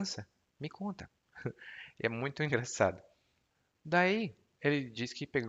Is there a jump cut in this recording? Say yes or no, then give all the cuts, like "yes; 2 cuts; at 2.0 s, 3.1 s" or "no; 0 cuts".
no; 0 cuts